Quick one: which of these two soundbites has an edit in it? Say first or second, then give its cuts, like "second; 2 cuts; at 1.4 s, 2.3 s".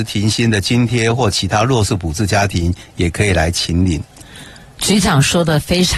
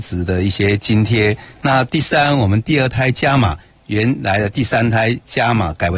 second; 1 cut; at 1.5 s